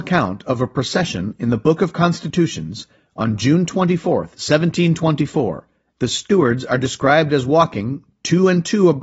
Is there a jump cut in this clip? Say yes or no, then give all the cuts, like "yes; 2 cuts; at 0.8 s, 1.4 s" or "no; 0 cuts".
yes; 1 cut; at 5.9 s